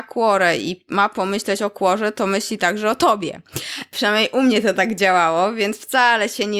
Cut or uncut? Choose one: uncut